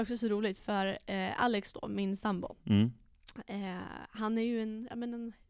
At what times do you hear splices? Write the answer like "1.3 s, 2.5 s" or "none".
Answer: none